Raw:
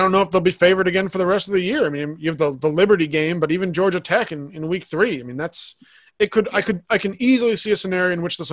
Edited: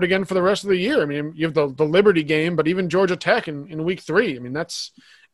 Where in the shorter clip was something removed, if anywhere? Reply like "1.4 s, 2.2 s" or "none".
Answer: none